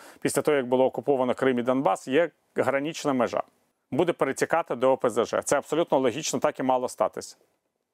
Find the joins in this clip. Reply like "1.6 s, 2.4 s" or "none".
3.7 s